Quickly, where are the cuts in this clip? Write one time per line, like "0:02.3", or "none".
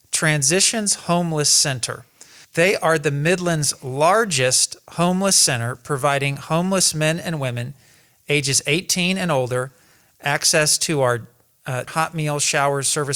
0:02.4
0:11.9